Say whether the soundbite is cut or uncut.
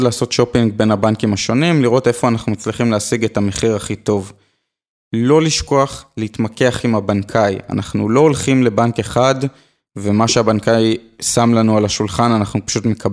uncut